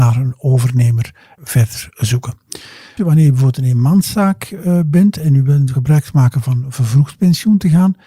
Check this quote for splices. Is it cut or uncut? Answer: cut